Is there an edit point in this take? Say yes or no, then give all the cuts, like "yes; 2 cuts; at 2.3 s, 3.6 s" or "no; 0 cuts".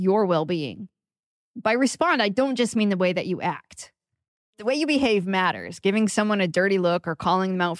no; 0 cuts